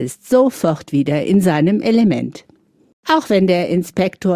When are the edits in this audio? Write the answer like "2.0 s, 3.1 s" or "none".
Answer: 2.9 s